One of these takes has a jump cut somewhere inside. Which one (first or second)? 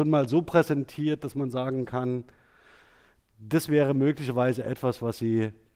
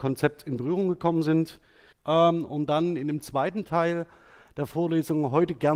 second